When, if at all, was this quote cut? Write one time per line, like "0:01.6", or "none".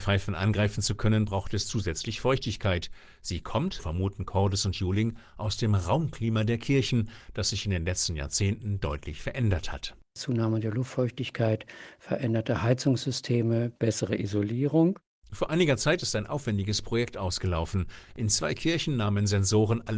0:03.8